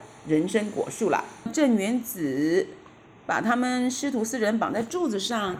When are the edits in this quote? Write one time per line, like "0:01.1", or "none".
0:01.5